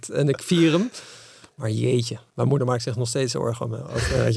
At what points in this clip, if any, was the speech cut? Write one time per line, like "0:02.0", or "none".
none